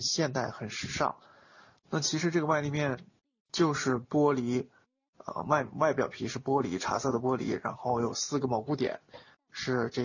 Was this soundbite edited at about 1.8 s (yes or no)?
yes